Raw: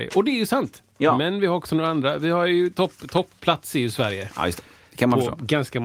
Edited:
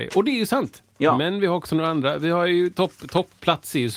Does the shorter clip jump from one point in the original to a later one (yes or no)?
no